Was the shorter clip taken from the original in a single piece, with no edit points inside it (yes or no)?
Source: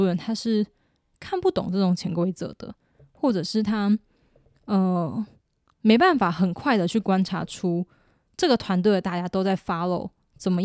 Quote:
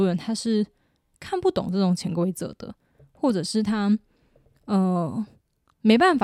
yes